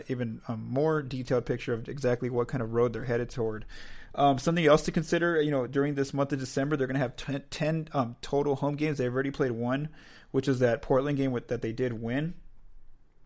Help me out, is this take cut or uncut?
uncut